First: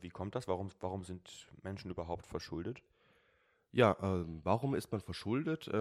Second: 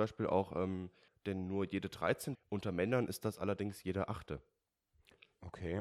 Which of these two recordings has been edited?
second; 2 cuts; at 1.1 s, 2.3 s

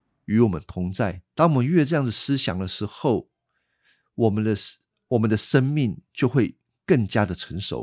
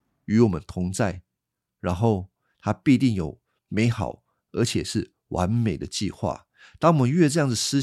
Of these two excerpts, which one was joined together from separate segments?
first; 1 cut; at 1.3 s

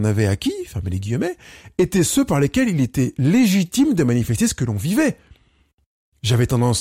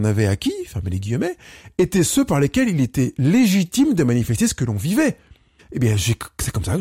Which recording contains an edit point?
second; 1 cut; at 5.6 s

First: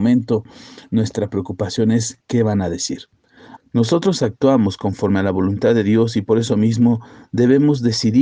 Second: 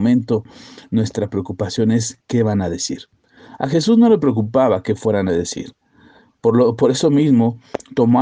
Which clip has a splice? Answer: first; 1 cut; at 3.6 s

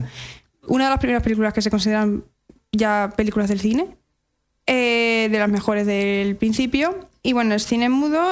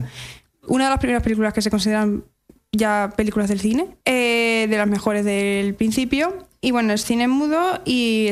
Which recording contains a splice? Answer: second; 1 cut; at 4.0 s

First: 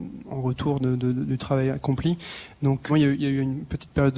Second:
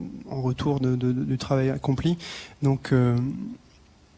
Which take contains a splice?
first; 1 cut; at 2.9 s

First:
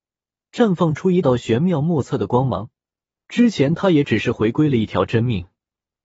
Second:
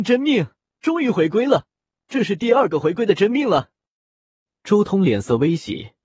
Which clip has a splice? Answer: first; 2 cuts; at 1.2 s, 3.2 s

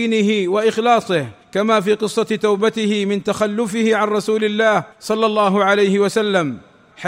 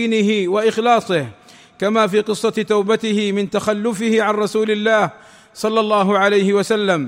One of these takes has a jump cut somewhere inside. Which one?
first; 2 cuts; at 1.4 s, 4.9 s

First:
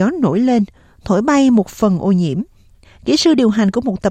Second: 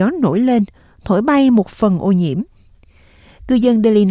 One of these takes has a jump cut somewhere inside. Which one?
first; 1 cut; at 2.8 s

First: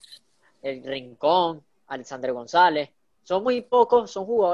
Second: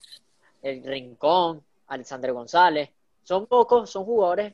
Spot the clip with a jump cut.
second; 1 cut; at 3.4 s

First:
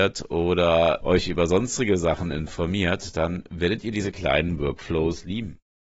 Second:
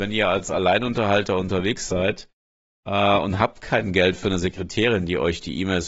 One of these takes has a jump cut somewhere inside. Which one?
first; 1 cut; at 1.0 s

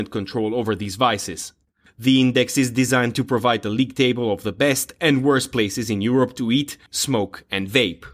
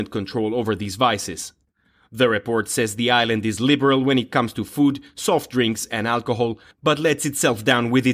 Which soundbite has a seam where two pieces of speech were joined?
first; 2 cuts; at 1.8 s, 6.9 s

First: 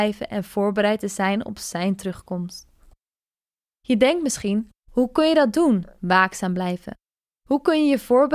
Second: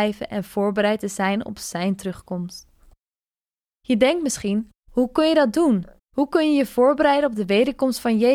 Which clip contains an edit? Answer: second; 1 cut; at 6.0 s

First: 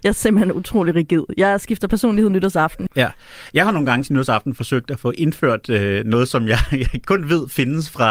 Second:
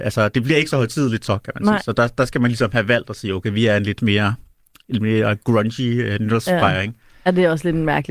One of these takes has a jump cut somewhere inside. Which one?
first; 1 cut; at 2.9 s

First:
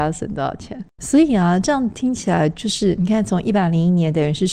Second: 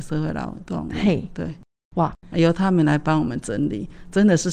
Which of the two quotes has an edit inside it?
first; 1 cut; at 1.0 s

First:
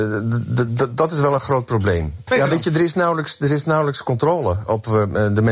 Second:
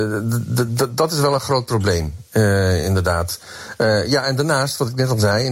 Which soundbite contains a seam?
first; 1 cut; at 2.3 s

